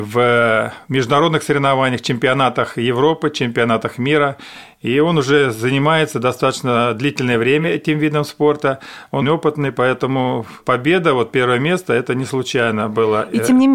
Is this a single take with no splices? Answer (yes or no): no